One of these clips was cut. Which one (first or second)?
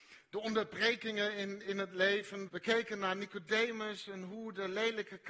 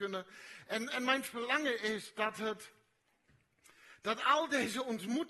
first